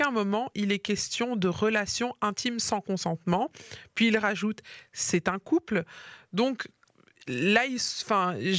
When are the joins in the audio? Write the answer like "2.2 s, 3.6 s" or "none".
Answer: none